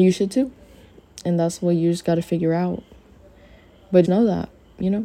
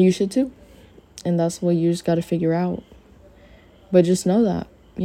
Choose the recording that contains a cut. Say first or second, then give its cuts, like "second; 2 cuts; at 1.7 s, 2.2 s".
first; 1 cut; at 4.1 s